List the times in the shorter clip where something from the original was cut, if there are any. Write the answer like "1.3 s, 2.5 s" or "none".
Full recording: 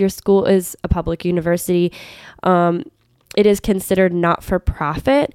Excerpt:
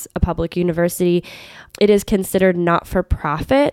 1.7 s